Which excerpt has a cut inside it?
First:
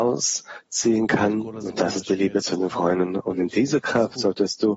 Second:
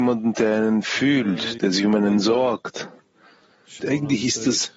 second; 2 cuts; at 1.6 s, 3.8 s

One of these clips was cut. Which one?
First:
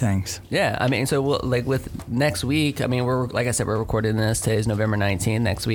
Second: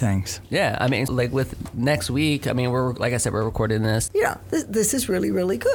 second; 2 cuts; at 1.1 s, 4.1 s

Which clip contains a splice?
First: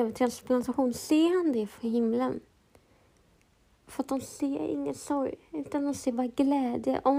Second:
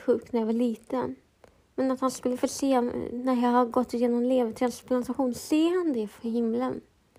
first; 1 cut; at 3.8 s

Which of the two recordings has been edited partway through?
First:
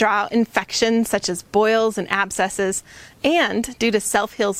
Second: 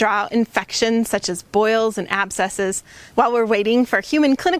second; 1 cut; at 3.1 s

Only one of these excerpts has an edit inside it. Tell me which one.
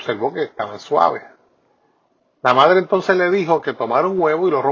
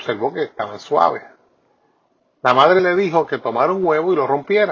second; 1 cut; at 2.8 s

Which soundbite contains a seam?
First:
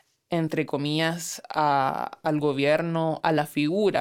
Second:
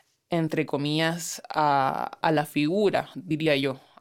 second; 1 cut; at 2.2 s

